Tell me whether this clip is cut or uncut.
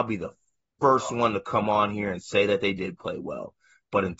uncut